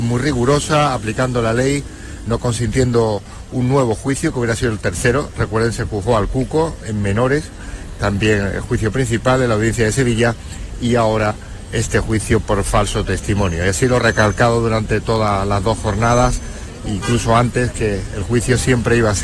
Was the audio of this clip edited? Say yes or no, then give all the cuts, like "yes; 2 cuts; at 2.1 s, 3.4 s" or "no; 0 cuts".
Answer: no; 0 cuts